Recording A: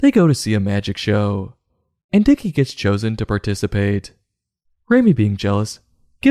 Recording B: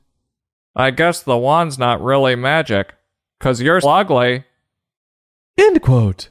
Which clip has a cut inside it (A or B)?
B